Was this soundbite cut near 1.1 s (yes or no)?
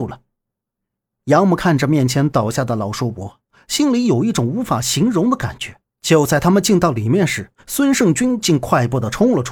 no